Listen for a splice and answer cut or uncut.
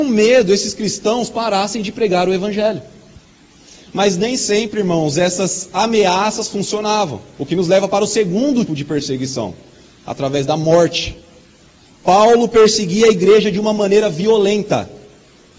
cut